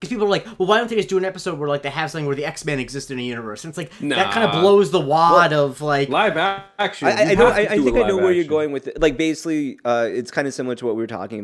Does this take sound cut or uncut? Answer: uncut